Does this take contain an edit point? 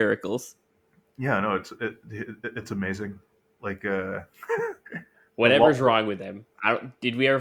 no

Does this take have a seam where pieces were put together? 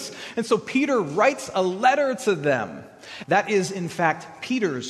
yes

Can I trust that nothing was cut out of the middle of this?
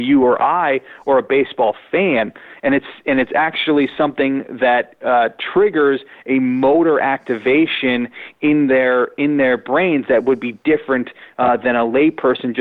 yes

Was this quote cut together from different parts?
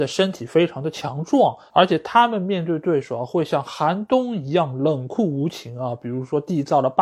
yes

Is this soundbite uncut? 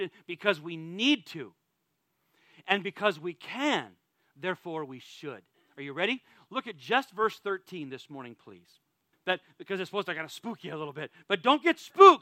no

